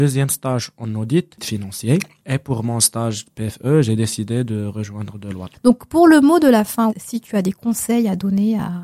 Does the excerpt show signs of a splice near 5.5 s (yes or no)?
yes